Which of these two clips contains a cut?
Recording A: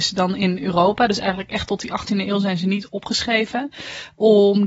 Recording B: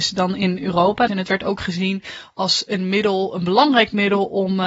B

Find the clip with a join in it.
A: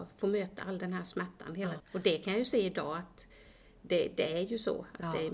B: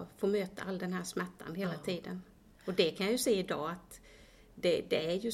A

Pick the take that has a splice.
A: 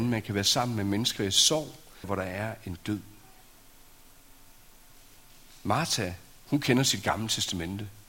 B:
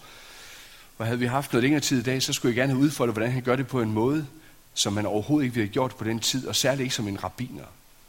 A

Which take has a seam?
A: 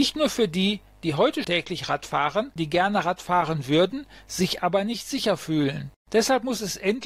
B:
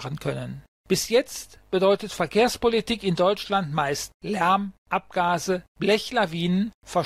A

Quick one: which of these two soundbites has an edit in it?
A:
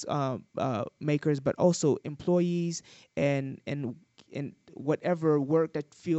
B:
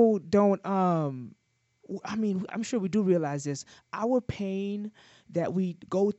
B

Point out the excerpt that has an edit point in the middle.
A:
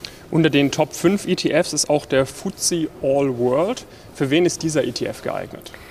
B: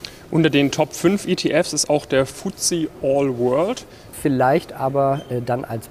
B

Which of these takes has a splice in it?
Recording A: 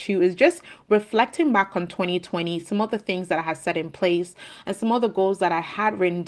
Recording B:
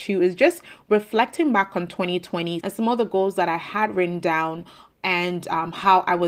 B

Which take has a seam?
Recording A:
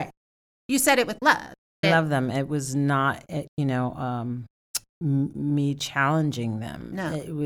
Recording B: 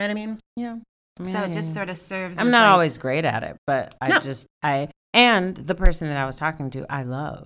A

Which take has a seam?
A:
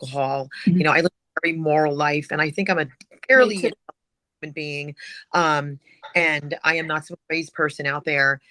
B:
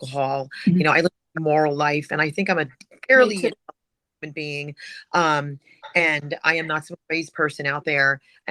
B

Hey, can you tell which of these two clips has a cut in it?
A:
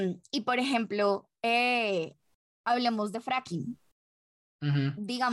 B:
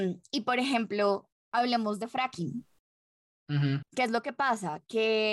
B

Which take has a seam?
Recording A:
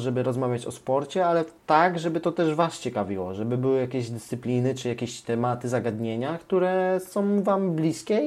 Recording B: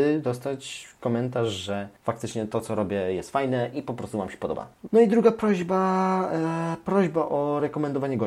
B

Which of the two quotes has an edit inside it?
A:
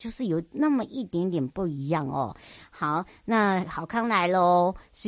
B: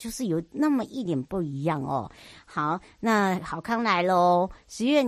B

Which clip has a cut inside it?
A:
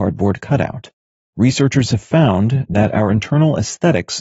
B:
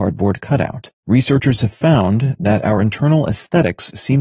B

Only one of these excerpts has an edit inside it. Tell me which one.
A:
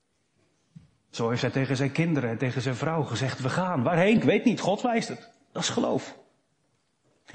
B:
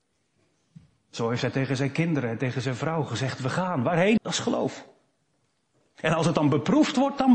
B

